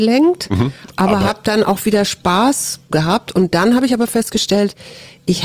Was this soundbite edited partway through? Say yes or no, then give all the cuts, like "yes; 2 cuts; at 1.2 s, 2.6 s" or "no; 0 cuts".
yes; 1 cut; at 2.9 s